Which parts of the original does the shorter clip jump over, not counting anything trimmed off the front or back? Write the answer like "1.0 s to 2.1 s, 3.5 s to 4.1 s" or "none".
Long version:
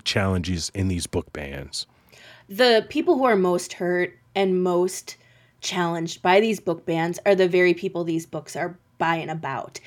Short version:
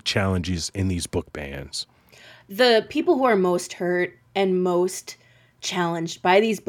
none